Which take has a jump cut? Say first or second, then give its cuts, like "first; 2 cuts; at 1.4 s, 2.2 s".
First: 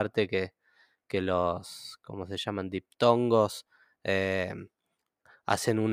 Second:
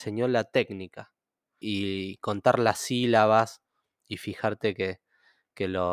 second; 1 cut; at 1.6 s